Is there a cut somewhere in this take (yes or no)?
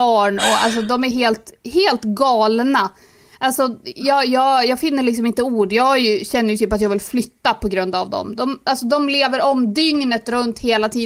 no